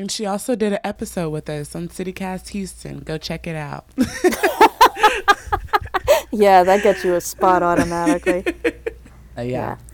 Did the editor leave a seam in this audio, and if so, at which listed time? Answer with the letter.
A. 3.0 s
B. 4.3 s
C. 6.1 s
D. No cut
D